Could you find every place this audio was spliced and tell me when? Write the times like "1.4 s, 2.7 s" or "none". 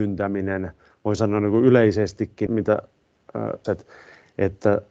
2.5 s, 3.6 s